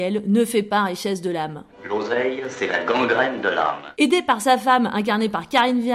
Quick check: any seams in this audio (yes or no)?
no